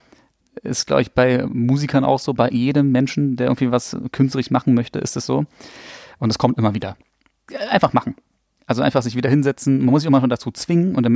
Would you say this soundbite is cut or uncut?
uncut